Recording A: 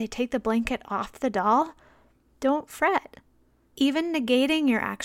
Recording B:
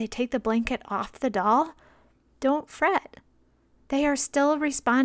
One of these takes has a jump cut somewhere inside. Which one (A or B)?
A